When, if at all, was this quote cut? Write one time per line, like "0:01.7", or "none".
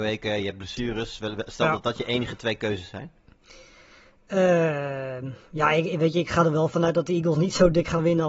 none

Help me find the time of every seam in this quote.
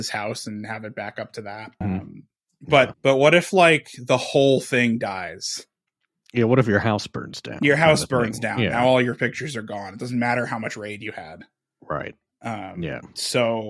0:01.8
0:02.9

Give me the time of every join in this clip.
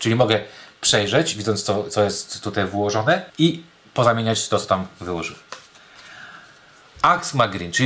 0:03.3

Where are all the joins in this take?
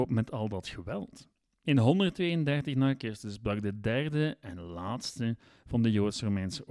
none

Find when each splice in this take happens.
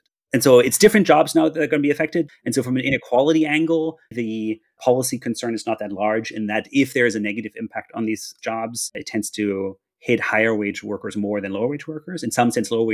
0:02.3
0:04.1

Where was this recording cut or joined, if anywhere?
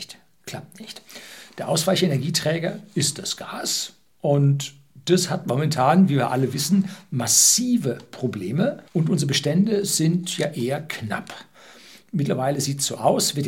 0:08.9

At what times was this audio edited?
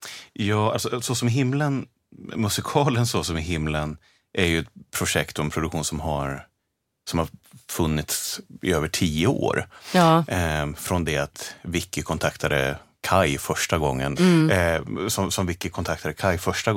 0:14.2

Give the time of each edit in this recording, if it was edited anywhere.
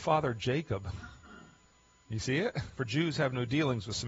0:02.7

